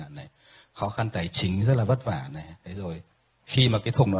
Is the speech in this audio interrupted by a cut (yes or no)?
no